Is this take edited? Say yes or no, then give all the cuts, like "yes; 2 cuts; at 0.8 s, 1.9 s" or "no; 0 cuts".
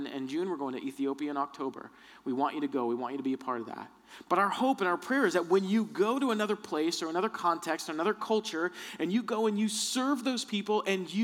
no; 0 cuts